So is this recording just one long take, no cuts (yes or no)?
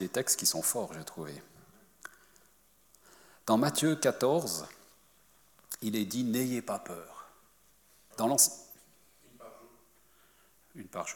no